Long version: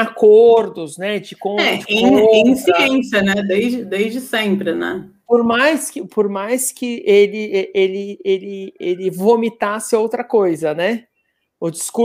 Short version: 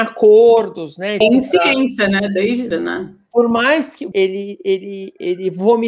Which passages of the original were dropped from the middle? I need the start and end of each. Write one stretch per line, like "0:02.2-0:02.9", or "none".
0:01.2-0:02.3
0:03.8-0:04.7
0:06.1-0:07.7